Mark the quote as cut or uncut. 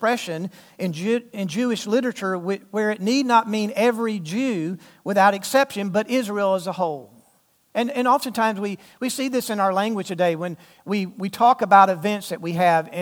uncut